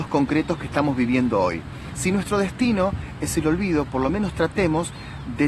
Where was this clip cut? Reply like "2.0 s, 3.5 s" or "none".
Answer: none